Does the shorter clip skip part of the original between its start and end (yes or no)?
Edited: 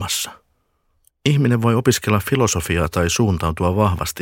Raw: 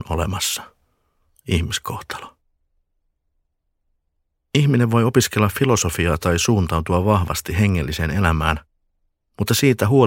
yes